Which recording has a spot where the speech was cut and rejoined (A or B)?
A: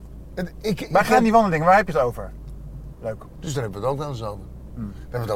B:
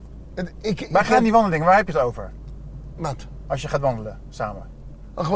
A